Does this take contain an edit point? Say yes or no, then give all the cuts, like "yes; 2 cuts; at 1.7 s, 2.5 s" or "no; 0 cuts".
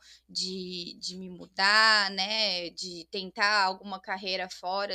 no; 0 cuts